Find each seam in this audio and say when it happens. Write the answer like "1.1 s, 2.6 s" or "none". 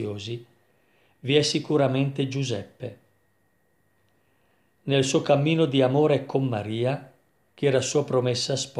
none